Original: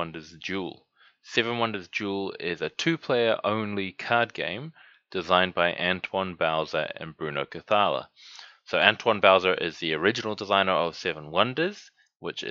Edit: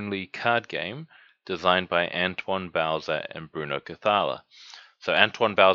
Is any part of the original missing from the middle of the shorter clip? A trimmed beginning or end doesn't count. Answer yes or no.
no